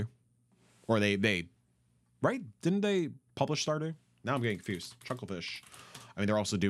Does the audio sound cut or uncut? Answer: uncut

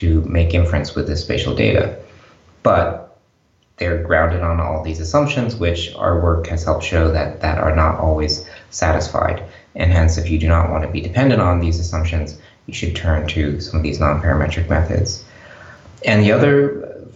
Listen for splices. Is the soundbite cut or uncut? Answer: uncut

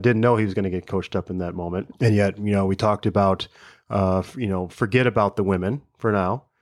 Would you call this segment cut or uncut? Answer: cut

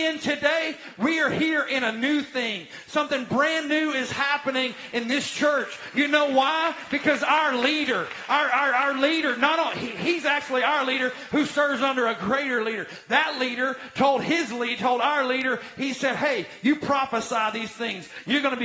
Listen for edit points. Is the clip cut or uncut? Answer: uncut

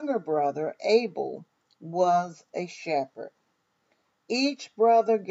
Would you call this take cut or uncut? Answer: uncut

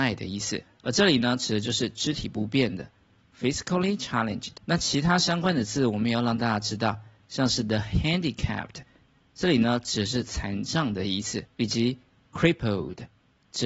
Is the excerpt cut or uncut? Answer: uncut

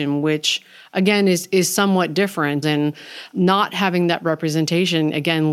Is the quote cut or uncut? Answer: cut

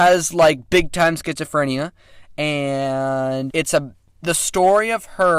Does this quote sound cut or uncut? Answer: cut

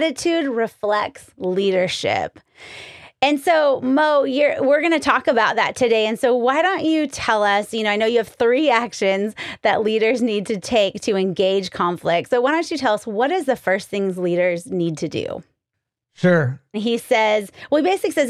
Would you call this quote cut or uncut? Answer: cut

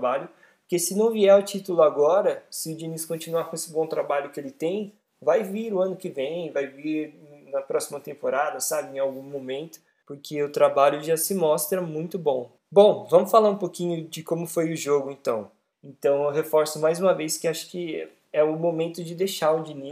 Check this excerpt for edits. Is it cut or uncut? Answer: cut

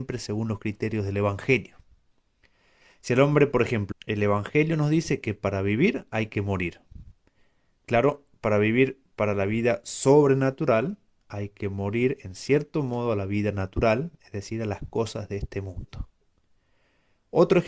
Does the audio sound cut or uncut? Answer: cut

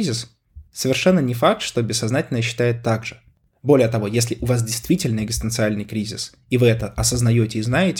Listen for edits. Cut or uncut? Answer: uncut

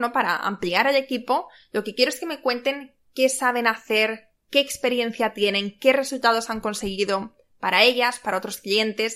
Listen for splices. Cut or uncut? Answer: uncut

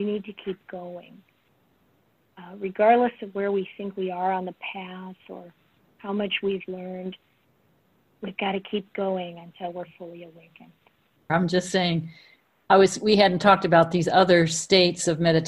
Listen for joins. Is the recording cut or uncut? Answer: cut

